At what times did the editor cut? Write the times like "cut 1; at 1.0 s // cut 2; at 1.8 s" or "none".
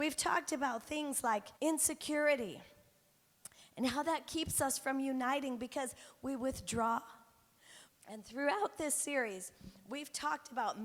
cut 1; at 1.6 s // cut 2; at 7.9 s